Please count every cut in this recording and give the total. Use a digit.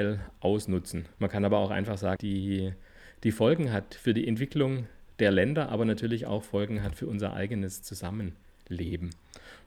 2